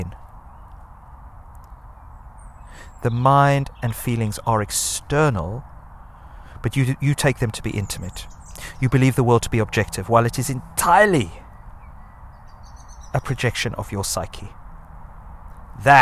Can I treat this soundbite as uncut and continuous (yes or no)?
yes